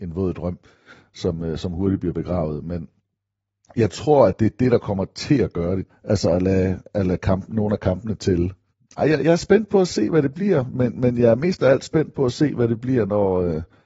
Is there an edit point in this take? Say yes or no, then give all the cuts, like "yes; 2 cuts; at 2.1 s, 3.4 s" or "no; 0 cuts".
yes; 1 cut; at 5.9 s